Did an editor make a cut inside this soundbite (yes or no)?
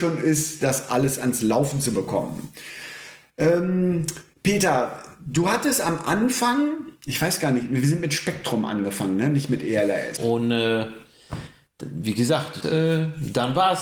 yes